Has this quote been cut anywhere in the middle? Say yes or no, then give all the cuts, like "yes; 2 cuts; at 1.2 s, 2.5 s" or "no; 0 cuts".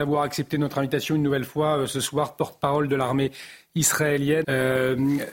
yes; 1 cut; at 4.4 s